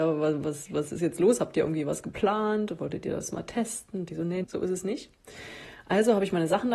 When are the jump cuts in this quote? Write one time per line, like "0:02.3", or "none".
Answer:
0:04.4